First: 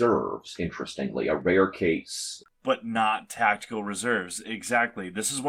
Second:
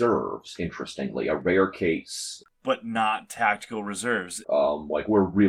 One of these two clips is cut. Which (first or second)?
second